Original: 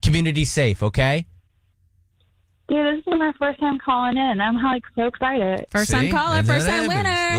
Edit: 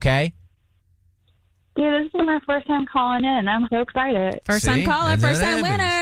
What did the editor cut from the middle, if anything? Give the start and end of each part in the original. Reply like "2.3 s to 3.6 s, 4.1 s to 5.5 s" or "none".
4.6 s to 4.9 s